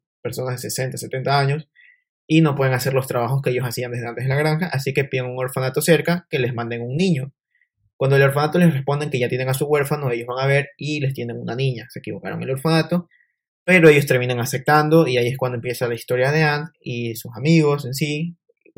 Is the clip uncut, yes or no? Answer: yes